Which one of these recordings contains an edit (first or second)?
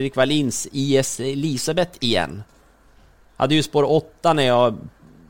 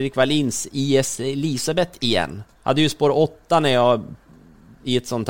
second